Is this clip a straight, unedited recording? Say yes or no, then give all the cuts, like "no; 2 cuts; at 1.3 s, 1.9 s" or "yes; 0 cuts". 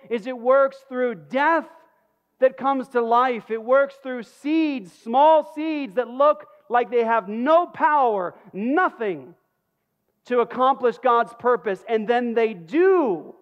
yes; 0 cuts